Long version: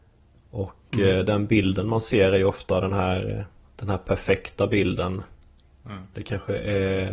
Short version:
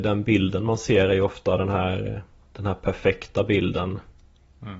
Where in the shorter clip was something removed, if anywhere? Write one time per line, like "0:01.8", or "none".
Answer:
none